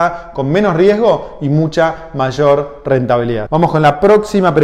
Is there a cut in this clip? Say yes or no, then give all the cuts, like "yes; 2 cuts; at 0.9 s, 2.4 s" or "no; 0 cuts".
yes; 1 cut; at 3.5 s